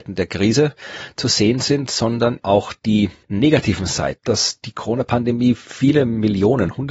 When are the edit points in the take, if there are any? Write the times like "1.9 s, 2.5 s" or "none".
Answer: 2.4 s